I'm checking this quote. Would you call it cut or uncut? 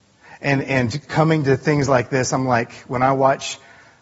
uncut